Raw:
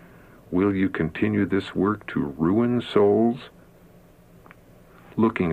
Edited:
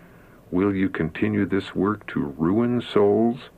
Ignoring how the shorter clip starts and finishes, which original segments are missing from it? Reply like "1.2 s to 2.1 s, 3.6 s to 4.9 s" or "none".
none